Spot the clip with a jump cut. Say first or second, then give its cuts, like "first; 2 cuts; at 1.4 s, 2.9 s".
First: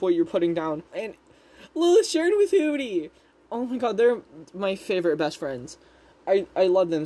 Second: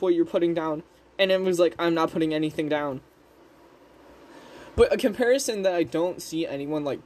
first; 1 cut; at 0.9 s